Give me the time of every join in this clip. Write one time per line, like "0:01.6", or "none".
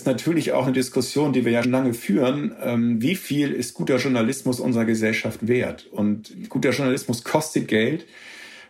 0:01.6